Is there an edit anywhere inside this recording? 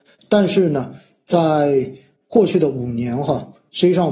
no; 0 cuts

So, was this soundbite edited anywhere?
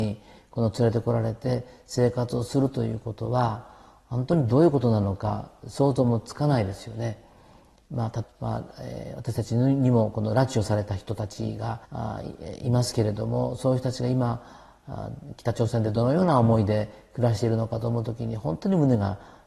yes; 2 cuts; at 8.2 s, 11.8 s

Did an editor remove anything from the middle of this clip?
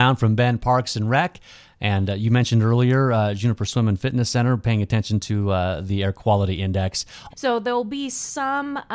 yes; 1 cut; at 7.3 s

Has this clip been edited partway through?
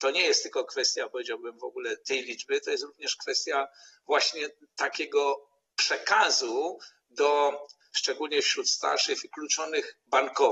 no; 0 cuts

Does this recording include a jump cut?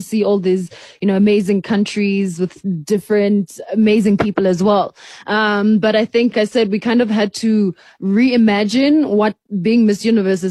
yes; 1 cut; at 6.3 s

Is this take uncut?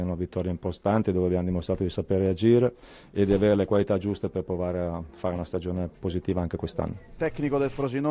yes; 0 cuts

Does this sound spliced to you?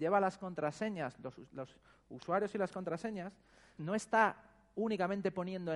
yes; 1 cut; at 3.8 s

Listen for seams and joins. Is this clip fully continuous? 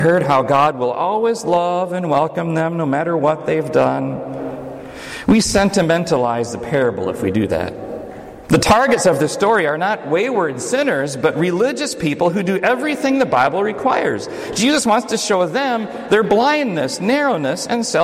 yes; 0 cuts

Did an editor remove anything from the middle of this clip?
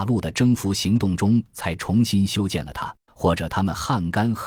yes; 1 cut; at 3.1 s

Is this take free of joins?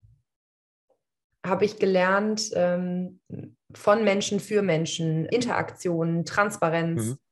no; 1 cut; at 5.3 s

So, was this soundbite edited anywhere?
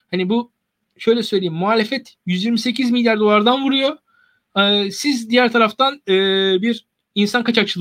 no; 0 cuts

